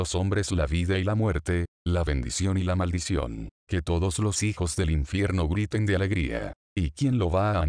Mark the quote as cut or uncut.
cut